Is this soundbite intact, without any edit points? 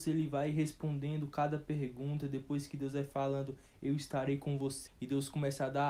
no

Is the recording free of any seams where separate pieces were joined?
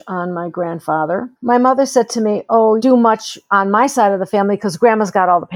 no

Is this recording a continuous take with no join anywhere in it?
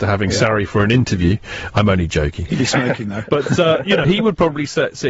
no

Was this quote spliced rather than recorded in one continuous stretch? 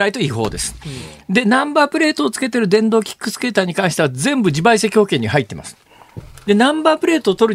yes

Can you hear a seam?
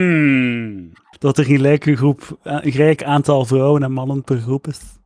yes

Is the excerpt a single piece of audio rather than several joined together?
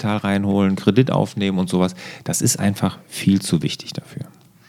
yes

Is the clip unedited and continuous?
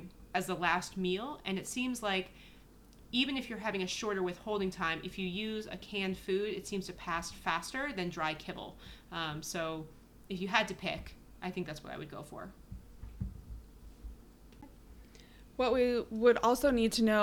yes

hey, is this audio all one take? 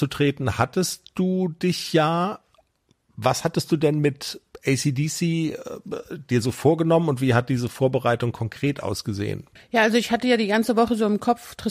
yes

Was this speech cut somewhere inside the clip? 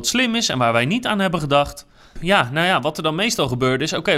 yes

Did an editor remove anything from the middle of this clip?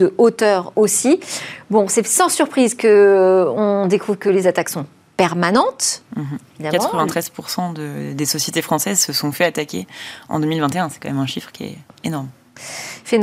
no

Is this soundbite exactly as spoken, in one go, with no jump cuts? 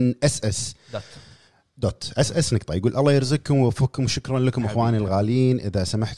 yes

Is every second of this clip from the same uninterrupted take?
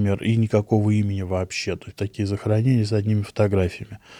no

